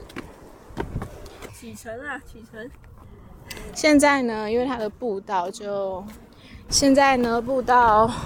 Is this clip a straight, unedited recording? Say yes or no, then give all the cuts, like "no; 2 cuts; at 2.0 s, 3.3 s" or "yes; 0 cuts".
no; 3 cuts; at 1.5 s, 3.7 s, 6.7 s